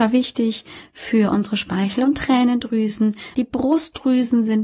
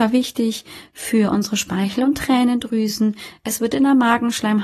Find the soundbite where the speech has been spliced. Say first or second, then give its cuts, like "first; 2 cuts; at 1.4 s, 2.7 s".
first; 1 cut; at 3.3 s